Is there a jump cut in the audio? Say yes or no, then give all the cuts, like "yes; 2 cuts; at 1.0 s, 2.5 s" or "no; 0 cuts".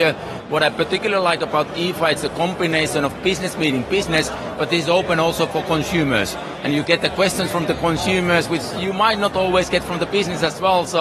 no; 0 cuts